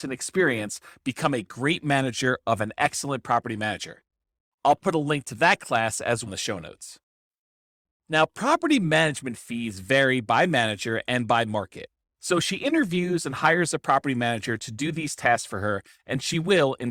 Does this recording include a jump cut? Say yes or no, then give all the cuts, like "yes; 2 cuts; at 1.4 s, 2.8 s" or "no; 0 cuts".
yes; 2 cuts; at 6.3 s, 12.1 s